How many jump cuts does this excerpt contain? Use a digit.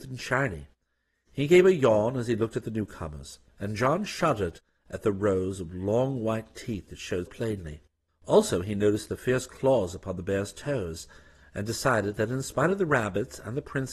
1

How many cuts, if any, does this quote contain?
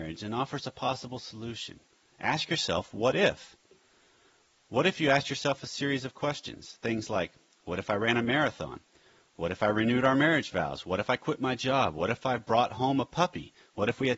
0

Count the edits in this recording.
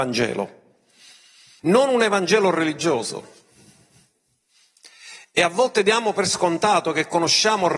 1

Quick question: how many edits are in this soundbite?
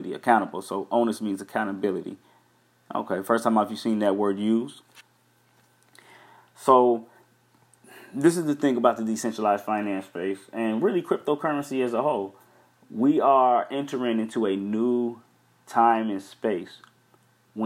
0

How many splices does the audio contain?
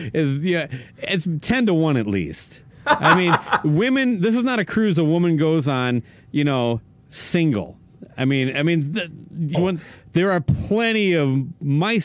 1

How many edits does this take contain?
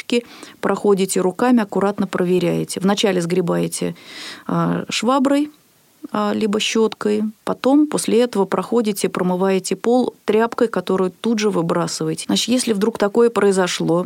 1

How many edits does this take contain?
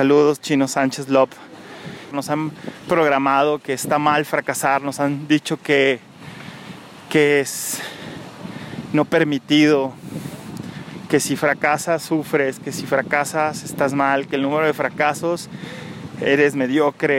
1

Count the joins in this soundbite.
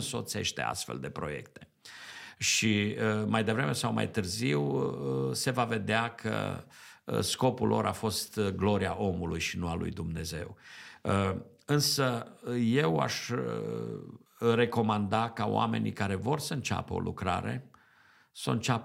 1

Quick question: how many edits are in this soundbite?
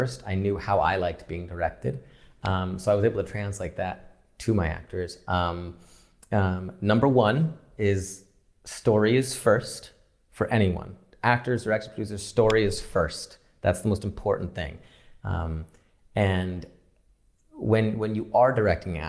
0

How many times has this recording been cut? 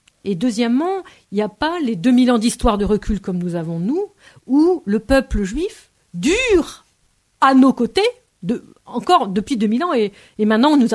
0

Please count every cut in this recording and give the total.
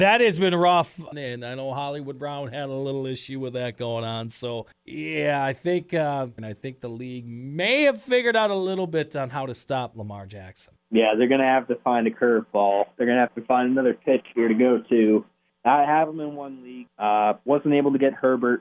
2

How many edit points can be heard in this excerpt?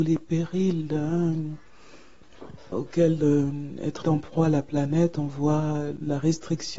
2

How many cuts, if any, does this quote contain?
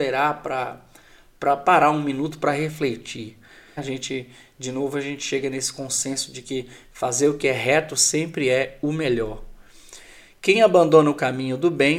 1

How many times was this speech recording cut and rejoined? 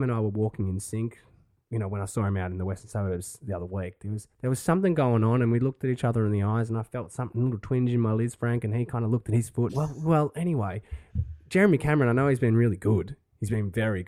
1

